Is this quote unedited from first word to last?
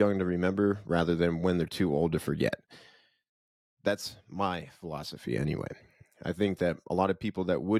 yes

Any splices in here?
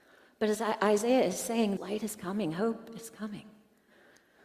yes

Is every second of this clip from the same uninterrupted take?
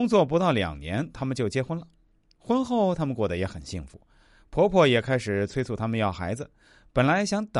yes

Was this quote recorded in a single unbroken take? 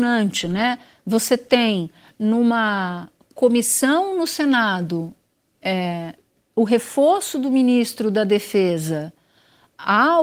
yes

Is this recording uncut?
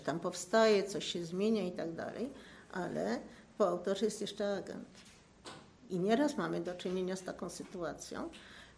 no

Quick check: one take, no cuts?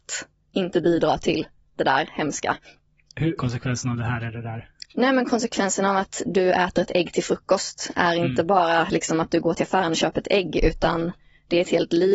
no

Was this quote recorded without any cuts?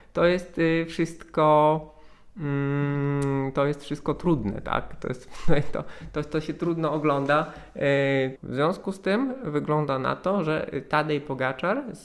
no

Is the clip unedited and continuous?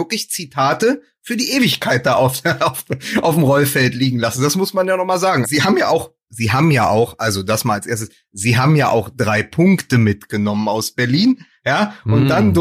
no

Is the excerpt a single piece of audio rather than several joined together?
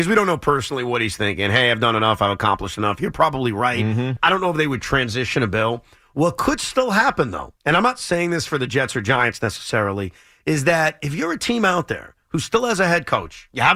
no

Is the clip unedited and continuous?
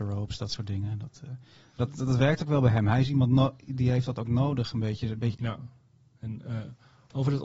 no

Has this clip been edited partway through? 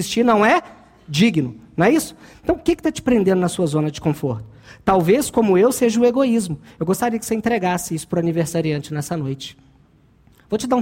no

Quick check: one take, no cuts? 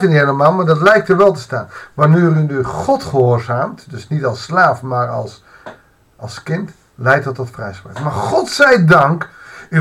yes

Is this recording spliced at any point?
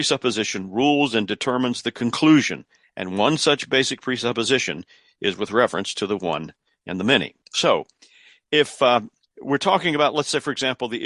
yes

